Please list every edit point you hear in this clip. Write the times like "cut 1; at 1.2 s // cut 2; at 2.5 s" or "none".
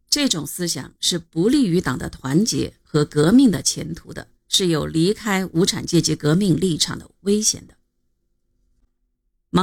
cut 1; at 4.4 s